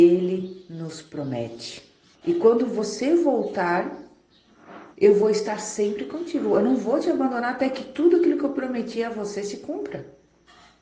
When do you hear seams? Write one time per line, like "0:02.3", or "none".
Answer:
0:02.1
0:04.9